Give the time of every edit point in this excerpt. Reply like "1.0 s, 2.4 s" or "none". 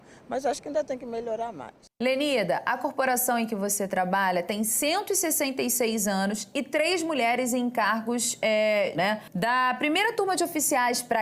8.9 s